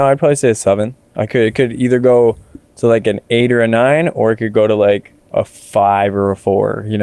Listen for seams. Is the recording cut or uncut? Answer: cut